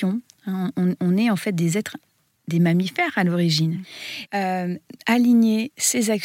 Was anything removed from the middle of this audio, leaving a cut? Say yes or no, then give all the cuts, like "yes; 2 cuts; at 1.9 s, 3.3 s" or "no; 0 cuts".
yes; 1 cut; at 4.3 s